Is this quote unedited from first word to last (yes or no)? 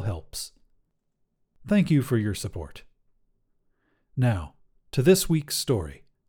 yes